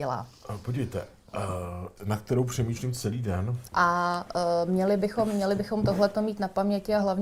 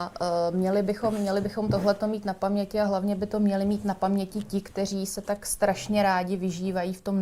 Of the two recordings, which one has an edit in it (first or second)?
first